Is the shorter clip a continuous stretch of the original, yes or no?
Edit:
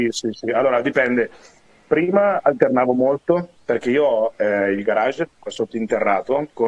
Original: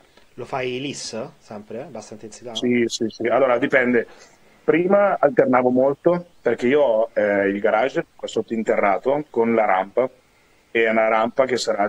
yes